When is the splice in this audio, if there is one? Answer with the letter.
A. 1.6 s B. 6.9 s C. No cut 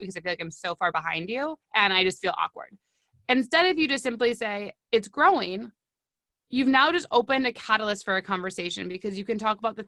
A